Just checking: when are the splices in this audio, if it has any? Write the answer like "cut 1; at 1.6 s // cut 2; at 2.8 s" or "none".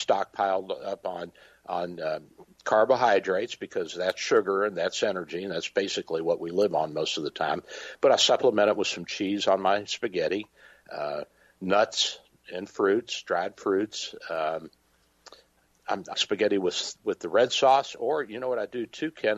cut 1; at 16.1 s